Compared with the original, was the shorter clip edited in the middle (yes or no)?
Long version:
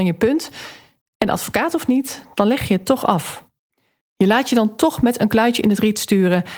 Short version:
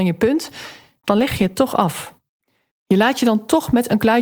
yes